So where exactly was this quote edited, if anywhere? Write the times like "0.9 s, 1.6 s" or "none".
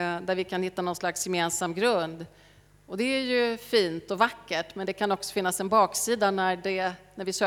none